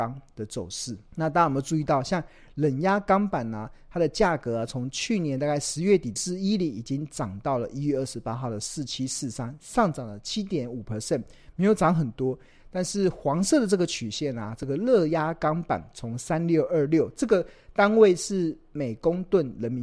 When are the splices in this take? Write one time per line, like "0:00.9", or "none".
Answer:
0:01.1
0:06.2